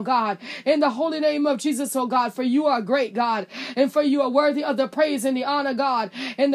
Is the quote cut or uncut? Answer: uncut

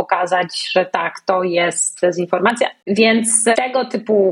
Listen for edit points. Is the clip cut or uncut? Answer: cut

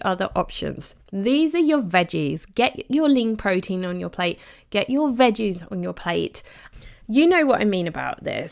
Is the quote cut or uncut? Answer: cut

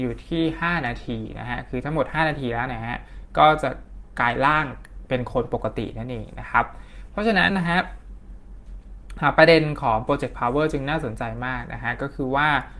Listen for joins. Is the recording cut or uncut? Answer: cut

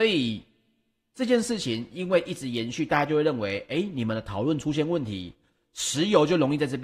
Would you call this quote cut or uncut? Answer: uncut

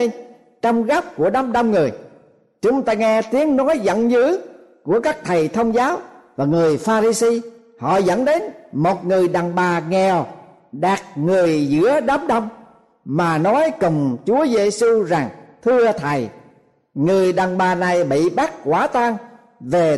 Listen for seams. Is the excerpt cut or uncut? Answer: uncut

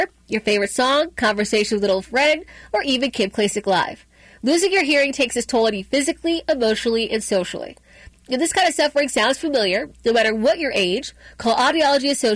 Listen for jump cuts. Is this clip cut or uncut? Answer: uncut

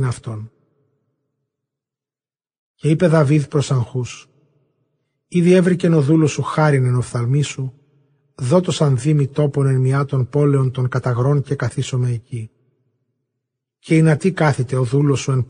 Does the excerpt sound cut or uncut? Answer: uncut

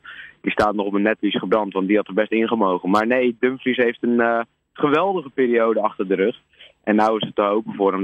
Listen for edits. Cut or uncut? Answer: uncut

